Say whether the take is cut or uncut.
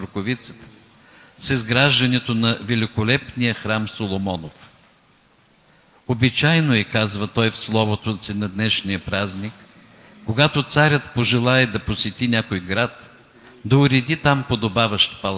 uncut